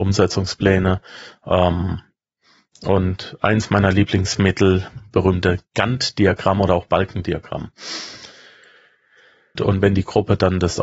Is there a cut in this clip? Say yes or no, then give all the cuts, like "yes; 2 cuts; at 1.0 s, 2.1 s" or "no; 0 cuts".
yes; 1 cut; at 9.6 s